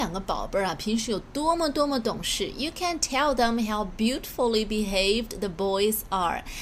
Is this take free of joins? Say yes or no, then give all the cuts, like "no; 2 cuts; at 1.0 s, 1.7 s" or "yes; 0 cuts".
yes; 0 cuts